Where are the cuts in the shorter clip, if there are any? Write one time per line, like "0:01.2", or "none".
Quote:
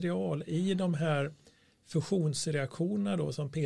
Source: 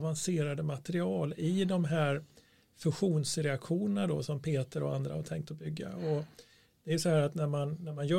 none